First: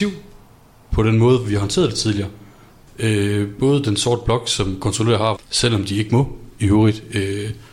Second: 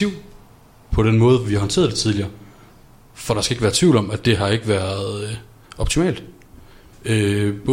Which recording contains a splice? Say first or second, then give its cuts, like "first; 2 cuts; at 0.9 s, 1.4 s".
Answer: first; 2 cuts; at 2.9 s, 5.4 s